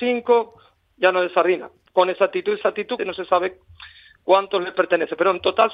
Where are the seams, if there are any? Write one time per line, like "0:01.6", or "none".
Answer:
0:03.0